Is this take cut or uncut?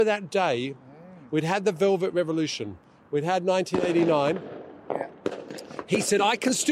uncut